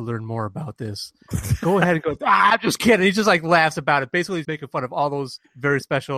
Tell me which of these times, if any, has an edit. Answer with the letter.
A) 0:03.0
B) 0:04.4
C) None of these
B